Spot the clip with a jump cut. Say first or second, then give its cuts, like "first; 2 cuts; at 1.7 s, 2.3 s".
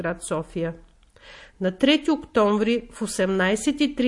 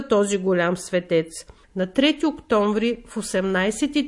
second; 1 cut; at 1.6 s